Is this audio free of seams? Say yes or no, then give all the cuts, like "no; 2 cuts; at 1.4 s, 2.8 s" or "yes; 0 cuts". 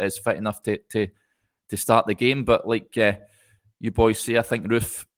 yes; 0 cuts